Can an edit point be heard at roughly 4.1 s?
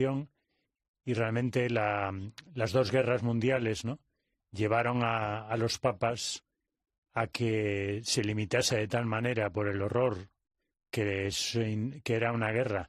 no; 0 cuts

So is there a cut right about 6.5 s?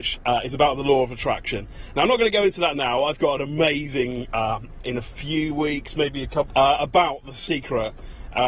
yes; 2 cuts; at 4.8 s, 6.5 s

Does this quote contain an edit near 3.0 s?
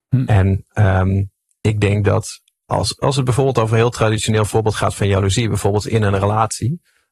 no; 0 cuts

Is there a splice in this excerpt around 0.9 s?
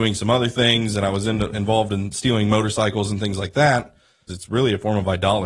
no; 1 cut; at 4.3 s

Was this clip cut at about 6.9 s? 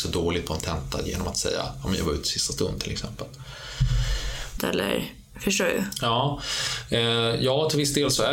no; 1 cut; at 4.6 s

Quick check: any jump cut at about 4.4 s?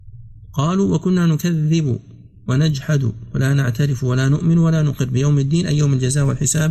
no; 0 cuts

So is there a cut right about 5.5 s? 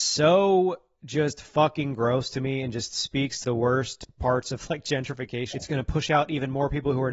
yes; 2 cuts; at 3.4 s, 5.5 s

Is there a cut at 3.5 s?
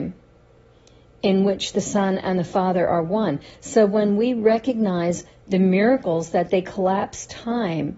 no; 0 cuts

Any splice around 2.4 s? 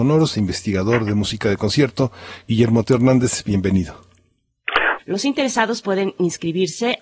no; 1 cut; at 5.0 s

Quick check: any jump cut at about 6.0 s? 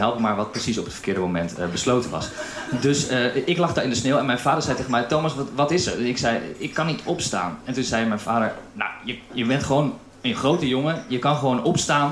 no; 1 cut; at 9.3 s

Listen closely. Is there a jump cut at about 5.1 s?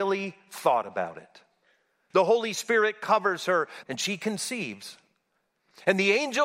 no; 2 cuts; at 2.1 s, 3.8 s

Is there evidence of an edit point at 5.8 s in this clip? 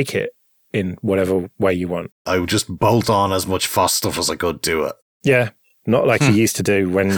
yes; 2 cuts; at 2.3 s, 5.8 s

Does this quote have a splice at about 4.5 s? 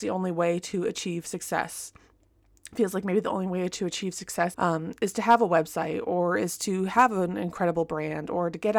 yes; 1 cut; at 4.5 s

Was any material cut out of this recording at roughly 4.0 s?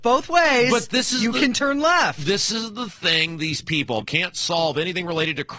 yes; 1 cut; at 4.0 s

